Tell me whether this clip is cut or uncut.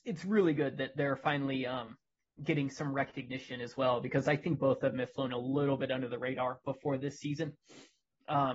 uncut